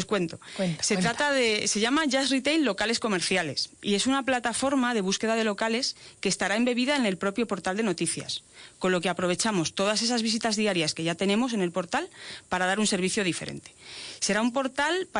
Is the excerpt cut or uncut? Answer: uncut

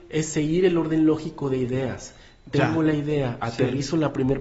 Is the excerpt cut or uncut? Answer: uncut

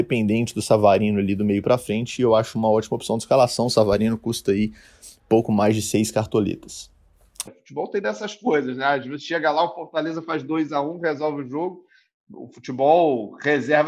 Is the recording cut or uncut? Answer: cut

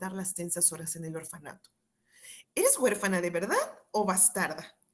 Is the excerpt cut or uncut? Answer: cut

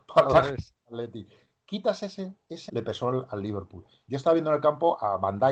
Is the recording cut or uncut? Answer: cut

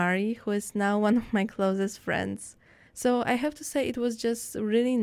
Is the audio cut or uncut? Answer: cut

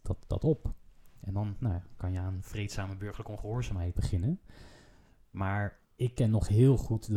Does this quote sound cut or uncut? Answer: cut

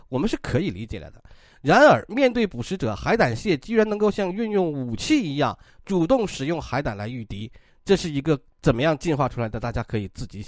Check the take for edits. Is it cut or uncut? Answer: uncut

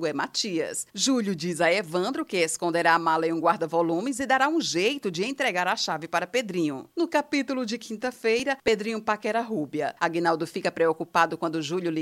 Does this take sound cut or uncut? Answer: uncut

